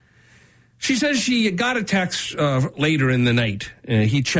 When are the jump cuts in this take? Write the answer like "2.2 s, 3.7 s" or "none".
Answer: none